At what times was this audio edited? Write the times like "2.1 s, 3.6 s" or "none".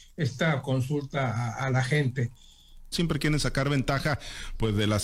2.9 s

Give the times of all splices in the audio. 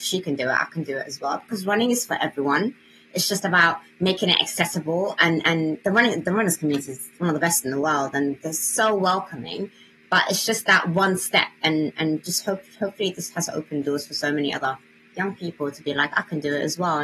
none

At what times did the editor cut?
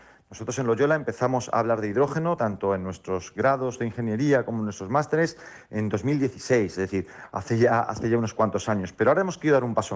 none

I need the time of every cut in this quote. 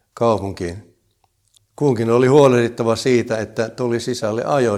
1.5 s

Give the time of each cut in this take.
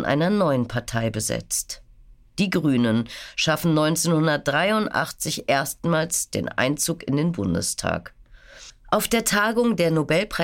none

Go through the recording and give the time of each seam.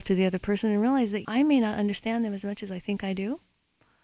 1.2 s

